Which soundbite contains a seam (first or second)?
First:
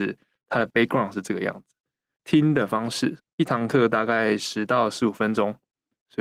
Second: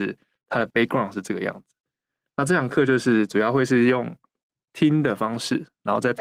first